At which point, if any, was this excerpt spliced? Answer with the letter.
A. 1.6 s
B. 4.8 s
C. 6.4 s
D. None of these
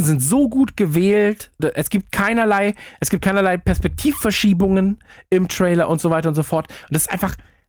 A